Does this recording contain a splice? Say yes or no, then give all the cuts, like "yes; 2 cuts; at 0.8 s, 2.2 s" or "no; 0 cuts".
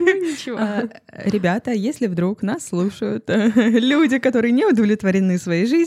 no; 0 cuts